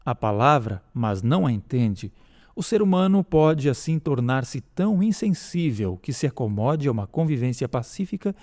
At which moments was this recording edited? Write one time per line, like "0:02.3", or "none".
0:02.4